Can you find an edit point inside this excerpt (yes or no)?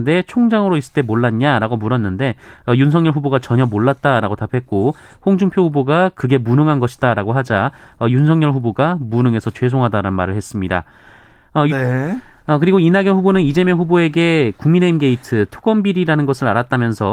yes